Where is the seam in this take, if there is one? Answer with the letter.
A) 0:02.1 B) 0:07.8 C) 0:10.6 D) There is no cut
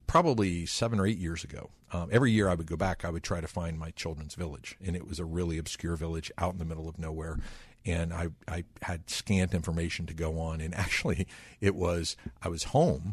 D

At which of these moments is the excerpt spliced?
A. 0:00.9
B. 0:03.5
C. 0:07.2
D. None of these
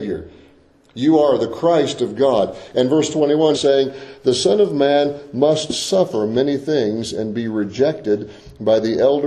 B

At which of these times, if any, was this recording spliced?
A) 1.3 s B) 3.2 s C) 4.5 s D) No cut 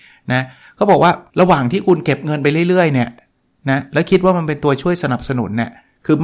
A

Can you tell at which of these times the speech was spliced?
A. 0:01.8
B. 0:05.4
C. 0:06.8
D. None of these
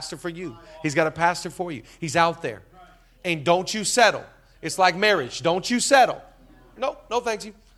C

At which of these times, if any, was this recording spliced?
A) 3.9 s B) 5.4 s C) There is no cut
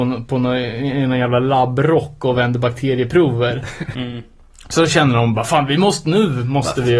A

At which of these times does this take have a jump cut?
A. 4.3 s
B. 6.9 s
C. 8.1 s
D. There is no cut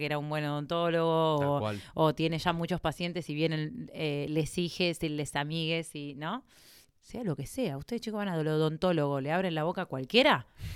B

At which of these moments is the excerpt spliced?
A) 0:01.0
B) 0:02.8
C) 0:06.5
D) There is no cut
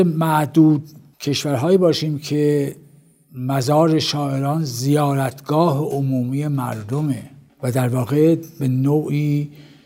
D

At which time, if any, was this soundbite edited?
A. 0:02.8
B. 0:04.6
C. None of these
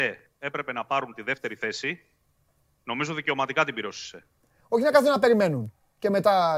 B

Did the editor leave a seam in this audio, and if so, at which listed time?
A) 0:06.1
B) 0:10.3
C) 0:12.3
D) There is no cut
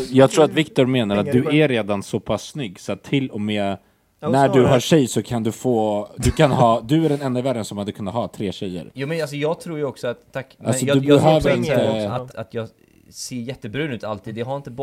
C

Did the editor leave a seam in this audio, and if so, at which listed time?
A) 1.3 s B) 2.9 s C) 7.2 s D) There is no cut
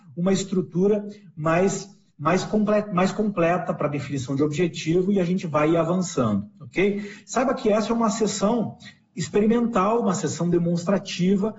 D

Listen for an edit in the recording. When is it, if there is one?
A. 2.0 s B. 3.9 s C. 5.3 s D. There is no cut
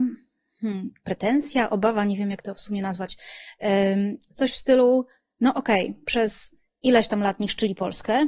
D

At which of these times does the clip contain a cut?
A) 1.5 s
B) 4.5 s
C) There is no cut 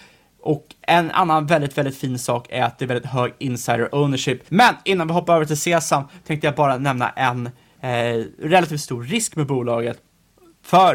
B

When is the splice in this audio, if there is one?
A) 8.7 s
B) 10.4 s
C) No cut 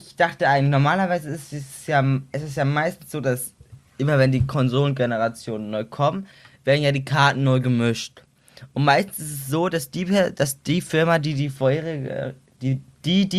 C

